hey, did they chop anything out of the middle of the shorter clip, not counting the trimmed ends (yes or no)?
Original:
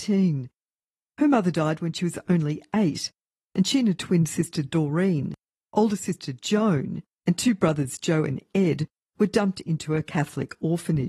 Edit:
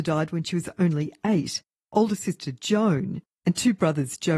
yes